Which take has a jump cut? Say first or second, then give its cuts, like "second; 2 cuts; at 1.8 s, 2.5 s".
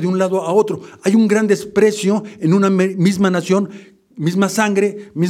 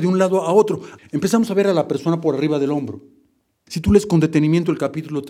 second; 2 cuts; at 1.0 s, 3.7 s